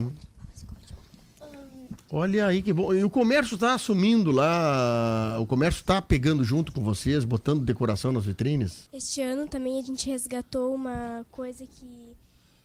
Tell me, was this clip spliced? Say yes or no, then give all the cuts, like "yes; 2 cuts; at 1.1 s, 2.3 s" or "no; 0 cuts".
yes; 2 cuts; at 2.0 s, 8.9 s